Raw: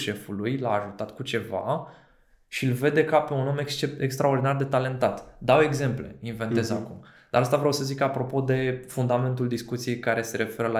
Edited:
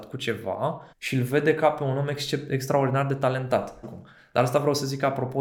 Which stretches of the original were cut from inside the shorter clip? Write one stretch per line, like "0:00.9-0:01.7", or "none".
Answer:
0:02.0-0:02.4
0:05.3-0:06.8